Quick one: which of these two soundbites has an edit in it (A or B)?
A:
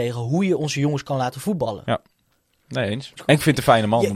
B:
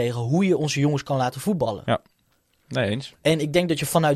A